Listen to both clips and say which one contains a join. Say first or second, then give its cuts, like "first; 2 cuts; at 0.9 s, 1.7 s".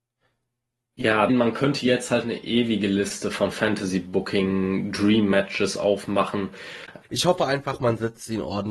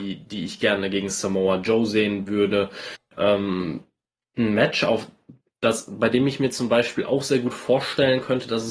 first; 2 cuts; at 1.3 s, 7.0 s